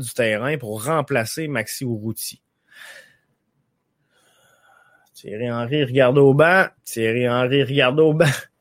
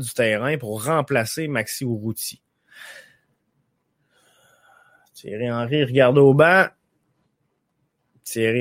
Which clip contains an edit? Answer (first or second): first